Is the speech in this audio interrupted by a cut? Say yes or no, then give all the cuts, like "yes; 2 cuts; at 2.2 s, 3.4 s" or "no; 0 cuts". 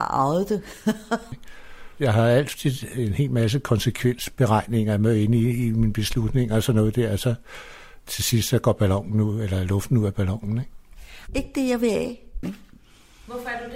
yes; 3 cuts; at 1.3 s, 11.3 s, 12.4 s